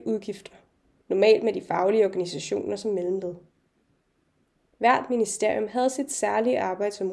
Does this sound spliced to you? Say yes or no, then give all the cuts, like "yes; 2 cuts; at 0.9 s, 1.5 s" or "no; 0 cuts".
yes; 1 cut; at 0.9 s